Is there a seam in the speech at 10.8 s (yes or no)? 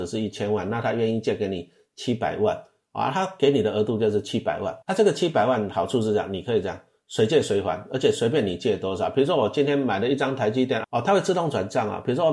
yes